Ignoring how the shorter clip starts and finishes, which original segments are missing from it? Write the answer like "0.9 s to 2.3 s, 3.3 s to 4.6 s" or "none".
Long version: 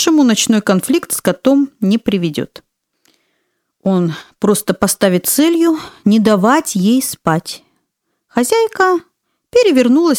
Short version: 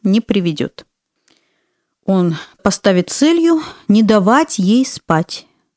4.4 s to 4.8 s